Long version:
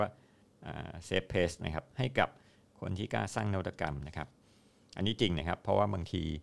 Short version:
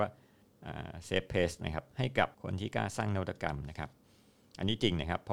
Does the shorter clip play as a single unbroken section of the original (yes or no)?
no